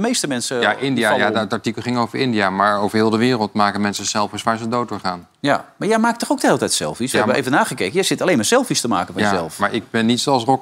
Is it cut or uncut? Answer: uncut